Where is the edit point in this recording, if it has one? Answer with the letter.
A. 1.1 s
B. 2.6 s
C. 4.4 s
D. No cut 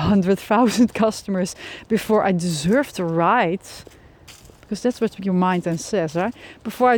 D